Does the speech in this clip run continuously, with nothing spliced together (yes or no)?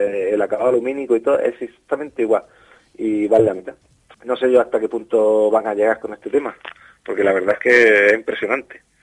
no